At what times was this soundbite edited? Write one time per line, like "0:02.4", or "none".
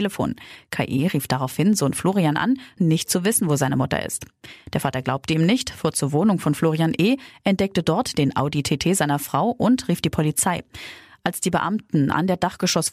0:02.8